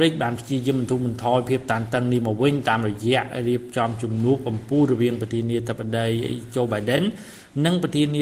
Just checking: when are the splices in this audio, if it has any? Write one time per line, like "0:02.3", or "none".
none